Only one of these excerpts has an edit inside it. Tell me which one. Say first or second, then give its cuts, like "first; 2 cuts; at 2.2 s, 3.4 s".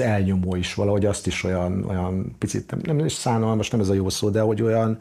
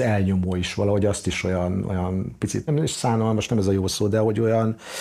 second; 1 cut; at 2.7 s